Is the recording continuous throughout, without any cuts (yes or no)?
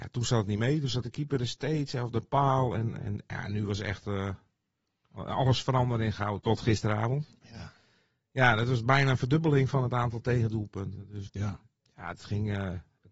no